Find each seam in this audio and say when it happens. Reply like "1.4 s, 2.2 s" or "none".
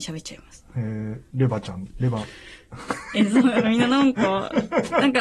1.3 s, 3.6 s

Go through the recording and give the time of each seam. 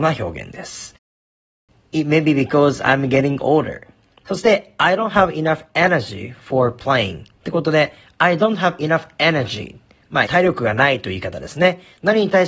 4.2 s, 10.3 s

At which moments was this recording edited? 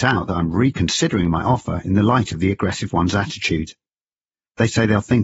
none

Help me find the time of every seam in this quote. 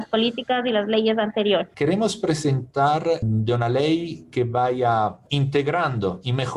3.2 s

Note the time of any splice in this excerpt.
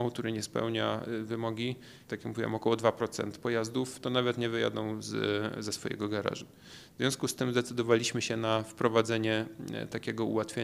2.1 s

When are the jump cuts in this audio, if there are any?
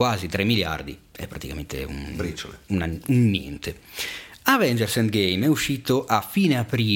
3.0 s

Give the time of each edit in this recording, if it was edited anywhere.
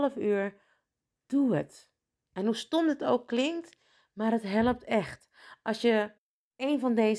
none

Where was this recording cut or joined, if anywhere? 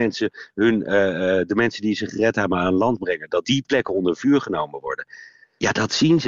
none

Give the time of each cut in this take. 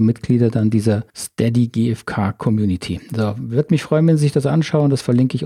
1.1 s

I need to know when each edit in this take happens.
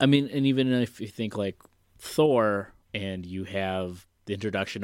2.8 s

